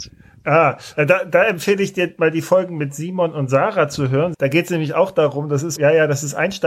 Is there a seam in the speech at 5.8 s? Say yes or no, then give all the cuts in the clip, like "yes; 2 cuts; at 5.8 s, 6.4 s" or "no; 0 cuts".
yes; 2 cuts; at 4.3 s, 5.8 s